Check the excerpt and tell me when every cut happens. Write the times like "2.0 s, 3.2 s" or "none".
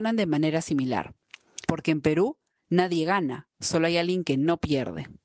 1.7 s